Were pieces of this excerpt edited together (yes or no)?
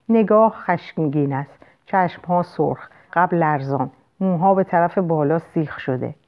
yes